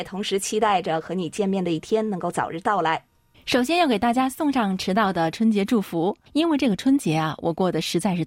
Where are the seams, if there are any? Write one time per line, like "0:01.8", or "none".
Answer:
0:03.3
0:06.3